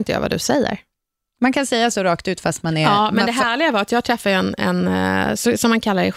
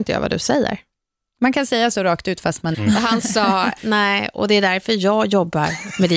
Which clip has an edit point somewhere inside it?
second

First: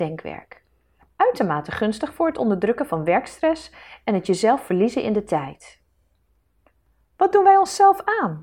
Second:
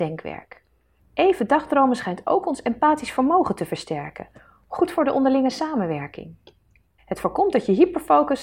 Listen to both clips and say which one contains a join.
second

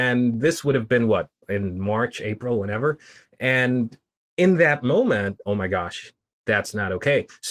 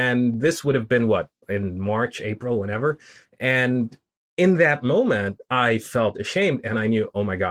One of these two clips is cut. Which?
first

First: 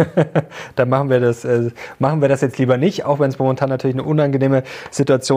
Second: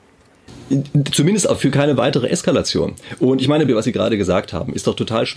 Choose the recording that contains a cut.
second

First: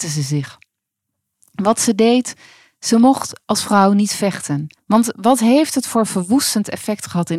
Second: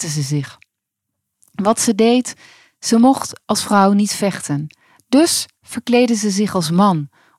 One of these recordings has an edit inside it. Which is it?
first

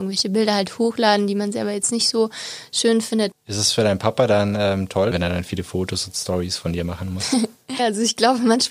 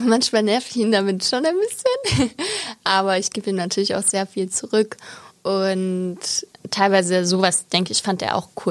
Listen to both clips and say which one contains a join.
first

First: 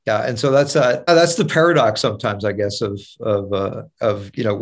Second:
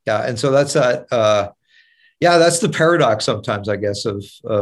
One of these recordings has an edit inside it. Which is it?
first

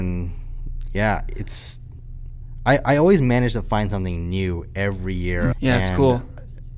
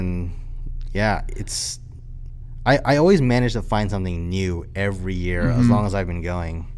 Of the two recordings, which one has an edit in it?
first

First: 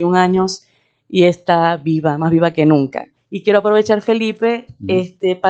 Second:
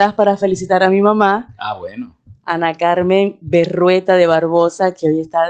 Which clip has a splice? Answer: first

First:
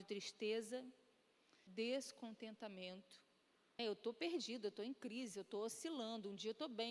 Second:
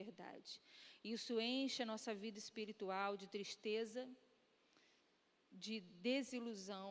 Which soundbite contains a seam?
first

